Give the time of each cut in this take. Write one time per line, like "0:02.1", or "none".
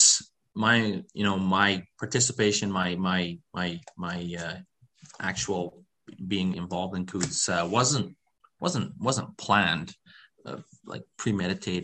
0:06.5